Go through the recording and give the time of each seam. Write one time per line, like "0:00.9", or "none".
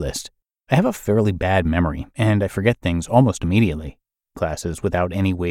0:04.4